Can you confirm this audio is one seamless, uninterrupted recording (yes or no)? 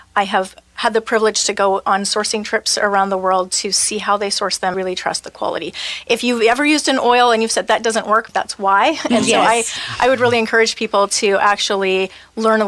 no